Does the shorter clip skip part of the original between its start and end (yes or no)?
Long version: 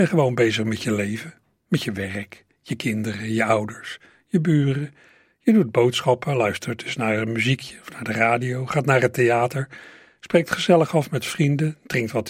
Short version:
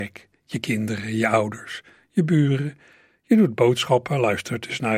no